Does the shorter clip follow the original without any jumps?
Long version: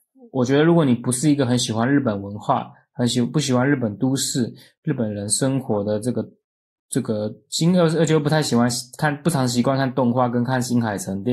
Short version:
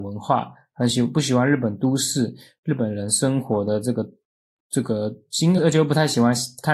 no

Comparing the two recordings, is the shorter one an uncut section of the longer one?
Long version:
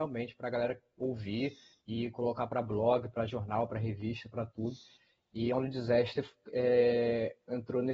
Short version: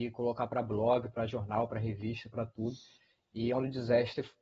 yes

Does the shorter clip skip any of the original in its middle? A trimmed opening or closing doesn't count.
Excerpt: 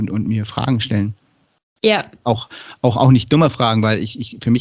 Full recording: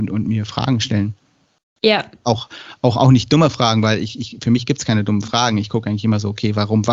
no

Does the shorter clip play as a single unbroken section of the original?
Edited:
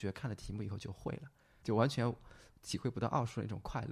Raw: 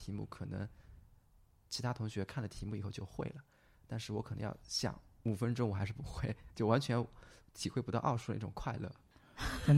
no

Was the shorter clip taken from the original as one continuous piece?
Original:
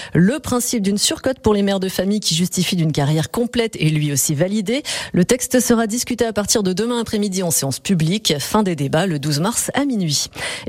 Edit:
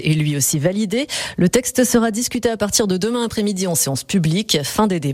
yes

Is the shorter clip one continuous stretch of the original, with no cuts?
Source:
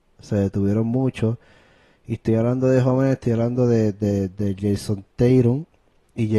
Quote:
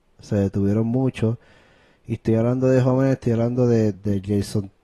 no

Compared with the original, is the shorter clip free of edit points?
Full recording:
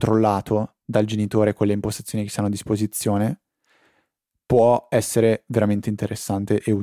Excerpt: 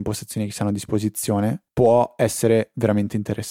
no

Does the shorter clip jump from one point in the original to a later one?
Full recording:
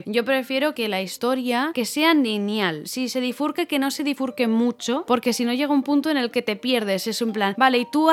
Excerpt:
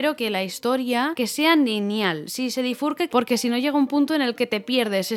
yes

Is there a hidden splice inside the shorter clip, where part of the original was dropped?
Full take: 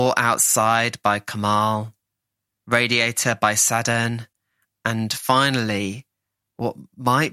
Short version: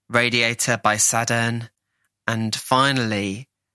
no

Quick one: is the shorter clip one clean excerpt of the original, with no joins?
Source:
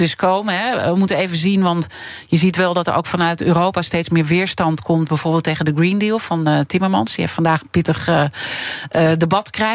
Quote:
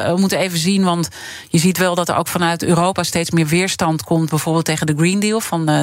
yes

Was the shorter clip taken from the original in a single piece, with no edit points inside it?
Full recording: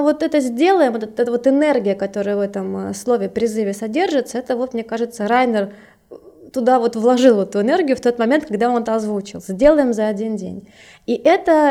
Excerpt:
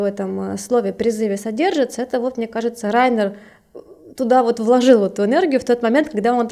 yes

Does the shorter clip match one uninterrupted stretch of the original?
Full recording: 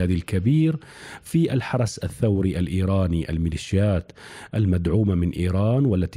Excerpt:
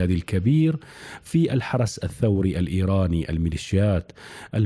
yes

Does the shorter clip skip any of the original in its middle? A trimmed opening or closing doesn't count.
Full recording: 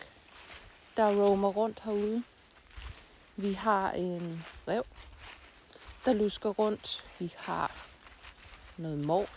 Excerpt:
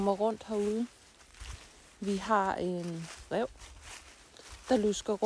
no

